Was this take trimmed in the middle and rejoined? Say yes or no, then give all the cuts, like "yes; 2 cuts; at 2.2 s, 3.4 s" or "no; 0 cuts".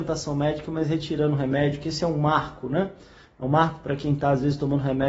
no; 0 cuts